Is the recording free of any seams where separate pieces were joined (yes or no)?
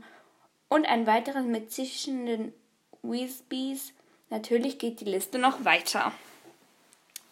yes